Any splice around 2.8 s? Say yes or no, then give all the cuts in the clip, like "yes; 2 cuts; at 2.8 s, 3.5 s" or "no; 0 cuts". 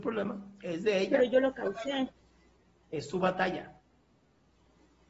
no; 0 cuts